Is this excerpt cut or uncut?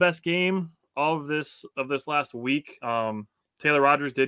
uncut